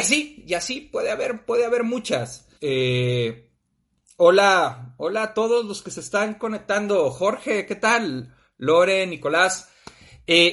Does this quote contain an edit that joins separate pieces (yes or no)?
yes